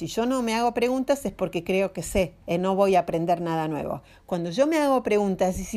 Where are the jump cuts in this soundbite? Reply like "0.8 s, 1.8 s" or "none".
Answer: 2.4 s

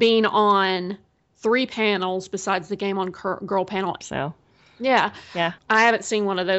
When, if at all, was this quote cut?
4.0 s, 5.6 s

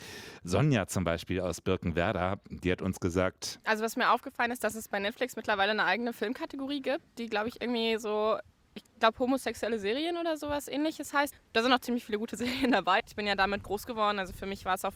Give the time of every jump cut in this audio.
11.3 s, 13.0 s

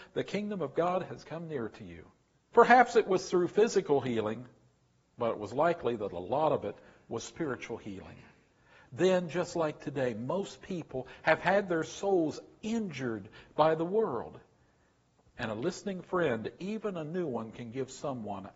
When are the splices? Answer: 2.5 s

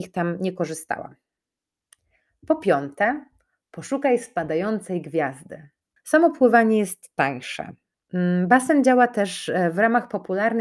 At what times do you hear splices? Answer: 6.0 s

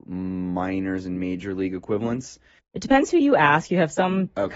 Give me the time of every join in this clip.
2.6 s

